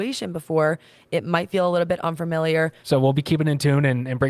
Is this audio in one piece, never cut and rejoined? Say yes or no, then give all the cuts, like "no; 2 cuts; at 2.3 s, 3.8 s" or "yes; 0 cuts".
no; 1 cut; at 2.8 s